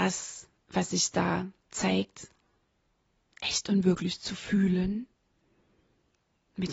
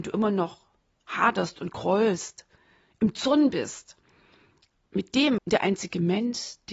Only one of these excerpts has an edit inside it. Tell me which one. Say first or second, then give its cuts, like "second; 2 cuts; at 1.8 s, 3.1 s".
second; 1 cut; at 5.4 s